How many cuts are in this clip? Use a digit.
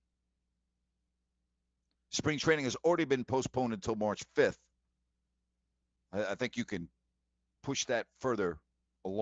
0